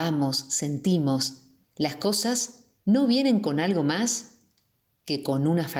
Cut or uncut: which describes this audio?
cut